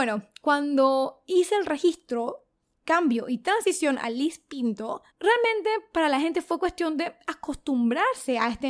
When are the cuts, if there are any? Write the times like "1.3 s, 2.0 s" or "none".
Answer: 5.1 s